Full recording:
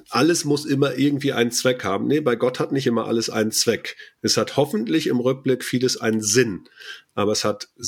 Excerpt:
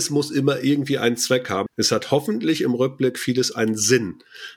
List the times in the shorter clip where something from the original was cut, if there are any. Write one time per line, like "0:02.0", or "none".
0:01.7